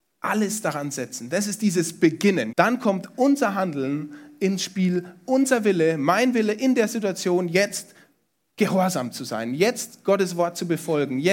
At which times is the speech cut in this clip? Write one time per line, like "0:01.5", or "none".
0:02.5